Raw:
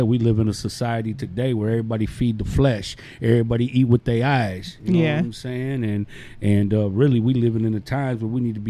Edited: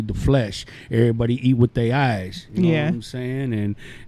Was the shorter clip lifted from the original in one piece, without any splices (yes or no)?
yes